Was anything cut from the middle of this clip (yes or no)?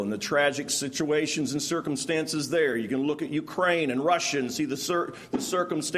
no